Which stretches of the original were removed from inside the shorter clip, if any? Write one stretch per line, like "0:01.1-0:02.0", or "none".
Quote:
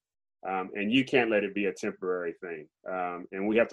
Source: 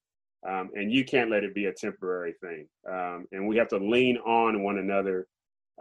none

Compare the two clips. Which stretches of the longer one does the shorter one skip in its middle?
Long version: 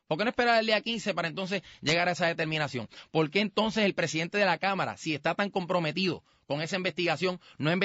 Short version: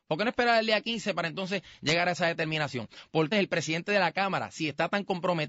0:03.3-0:03.8

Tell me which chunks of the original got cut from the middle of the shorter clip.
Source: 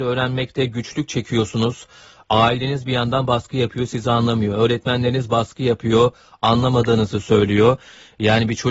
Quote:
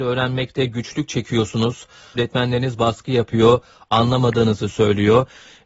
0:02.2-0:04.7

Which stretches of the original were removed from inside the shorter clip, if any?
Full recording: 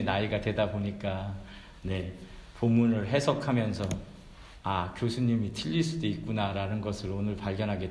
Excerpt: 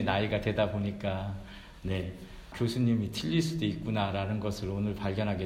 0:02.5-0:04.9

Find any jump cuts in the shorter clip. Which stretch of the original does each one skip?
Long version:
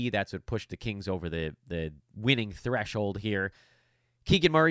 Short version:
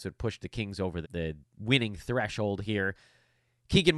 0:01.3-0:01.6

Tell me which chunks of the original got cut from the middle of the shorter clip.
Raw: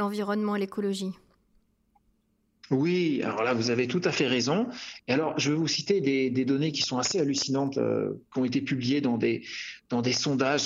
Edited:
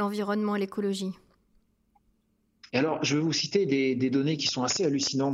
0:02.7-0:05.0

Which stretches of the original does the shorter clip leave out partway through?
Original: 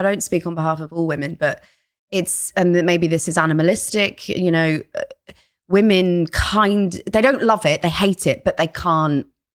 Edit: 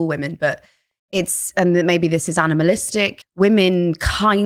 0:04.2-0:05.5

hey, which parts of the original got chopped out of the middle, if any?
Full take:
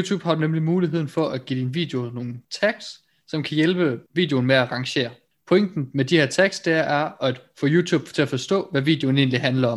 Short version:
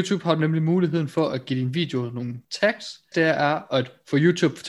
0:03.1-0:06.6

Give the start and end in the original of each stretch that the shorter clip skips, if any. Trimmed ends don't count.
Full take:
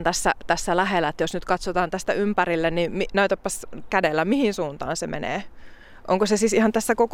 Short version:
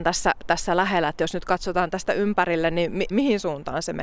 0:03.1-0:04.2

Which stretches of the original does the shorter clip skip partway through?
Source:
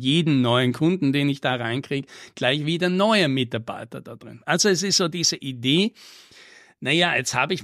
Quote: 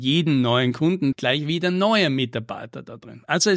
0:01.1-0:02.3

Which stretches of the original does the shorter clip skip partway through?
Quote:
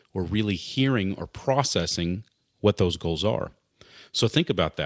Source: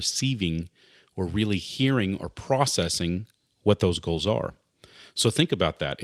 none

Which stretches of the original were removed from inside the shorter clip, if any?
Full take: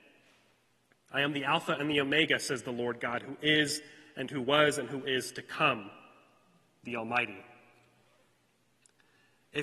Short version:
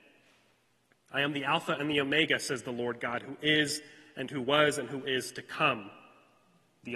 none

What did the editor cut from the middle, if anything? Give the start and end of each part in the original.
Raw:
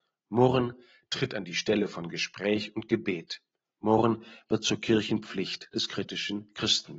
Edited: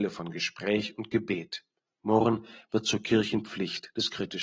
none

